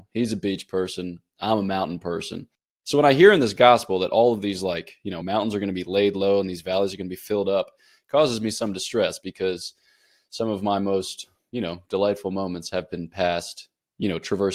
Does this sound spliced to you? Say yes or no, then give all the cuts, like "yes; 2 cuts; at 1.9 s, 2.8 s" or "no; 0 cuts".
no; 0 cuts